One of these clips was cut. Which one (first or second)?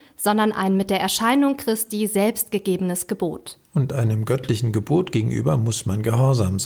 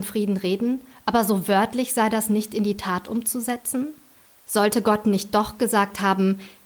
first